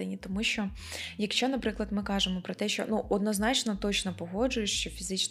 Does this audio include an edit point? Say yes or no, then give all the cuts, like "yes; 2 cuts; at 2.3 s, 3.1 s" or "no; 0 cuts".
no; 0 cuts